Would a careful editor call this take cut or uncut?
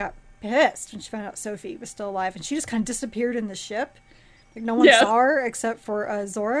uncut